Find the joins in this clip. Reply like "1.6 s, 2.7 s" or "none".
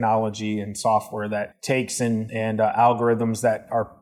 none